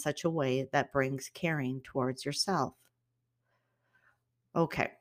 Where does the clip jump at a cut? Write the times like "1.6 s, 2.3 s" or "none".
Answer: none